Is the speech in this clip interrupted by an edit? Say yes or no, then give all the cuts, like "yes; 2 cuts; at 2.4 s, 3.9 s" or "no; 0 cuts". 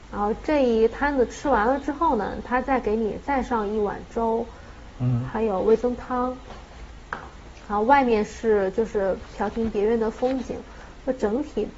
no; 0 cuts